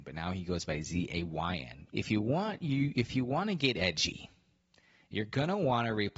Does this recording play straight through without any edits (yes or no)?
no